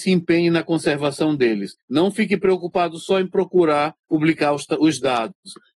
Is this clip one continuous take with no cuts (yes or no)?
yes